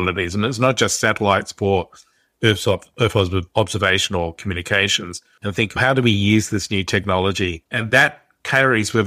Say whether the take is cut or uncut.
cut